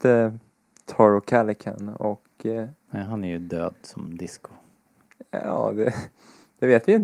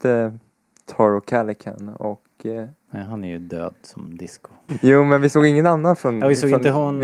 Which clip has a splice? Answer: second; 1 cut; at 4.7 s

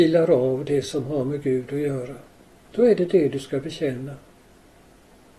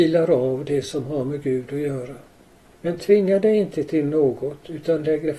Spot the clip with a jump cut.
second; 1 cut; at 2.7 s

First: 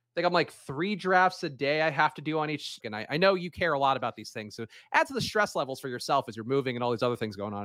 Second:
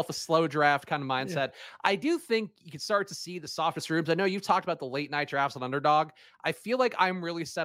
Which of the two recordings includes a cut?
first; 1 cut; at 2.8 s

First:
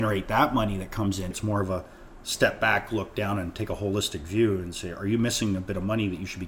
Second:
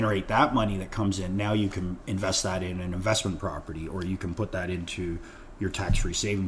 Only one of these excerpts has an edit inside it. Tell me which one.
first; 1 cut; at 1.3 s

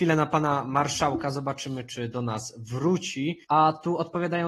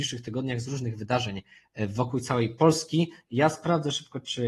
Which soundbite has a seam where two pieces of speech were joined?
first; 1 cut; at 3.4 s

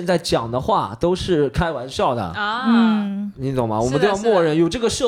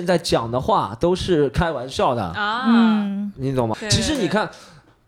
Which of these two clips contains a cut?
second; 1 cut; at 3.7 s

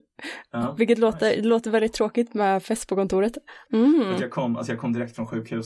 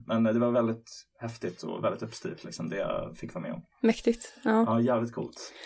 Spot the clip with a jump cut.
first; 1 cut; at 3.7 s

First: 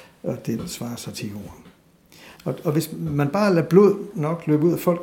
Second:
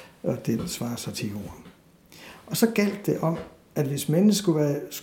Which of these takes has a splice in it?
first; 1 cut; at 2.4 s

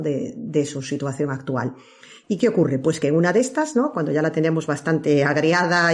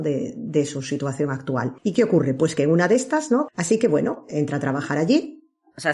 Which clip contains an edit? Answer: second; 2 cuts; at 1.8 s, 3.5 s

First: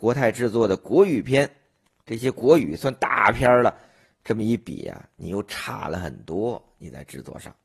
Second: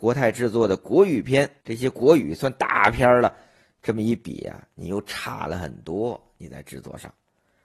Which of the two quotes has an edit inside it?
second; 1 cut; at 1.6 s

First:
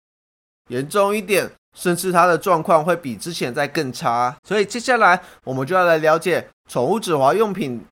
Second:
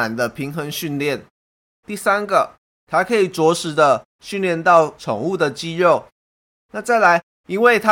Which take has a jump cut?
first; 1 cut; at 4.4 s

